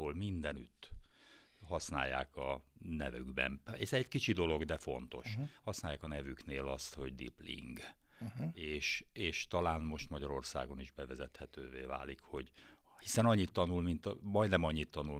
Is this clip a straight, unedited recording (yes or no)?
yes